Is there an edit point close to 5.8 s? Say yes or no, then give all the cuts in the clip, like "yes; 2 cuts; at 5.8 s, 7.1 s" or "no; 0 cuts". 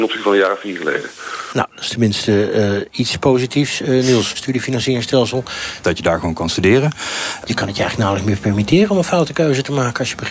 yes; 3 cuts; at 4.3 s, 5.8 s, 7.4 s